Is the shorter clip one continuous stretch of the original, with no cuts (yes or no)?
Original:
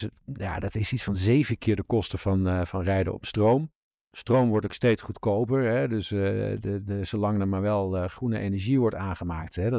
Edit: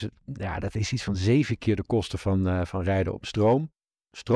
yes